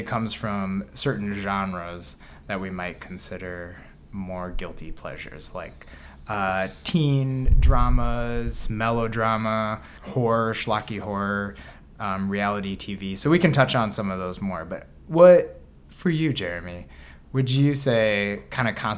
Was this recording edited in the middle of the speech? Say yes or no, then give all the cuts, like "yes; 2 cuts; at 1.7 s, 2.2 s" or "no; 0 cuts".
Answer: no; 0 cuts